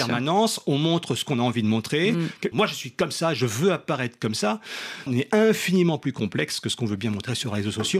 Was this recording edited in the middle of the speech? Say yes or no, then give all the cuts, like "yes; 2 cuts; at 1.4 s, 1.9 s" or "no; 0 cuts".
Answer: yes; 2 cuts; at 2.5 s, 5.1 s